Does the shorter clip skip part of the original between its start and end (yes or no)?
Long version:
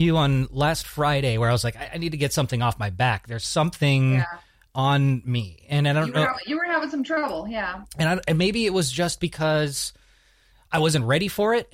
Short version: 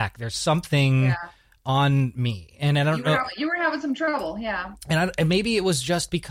no